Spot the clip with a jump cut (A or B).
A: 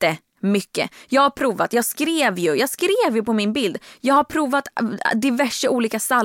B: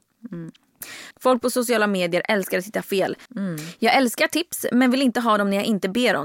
B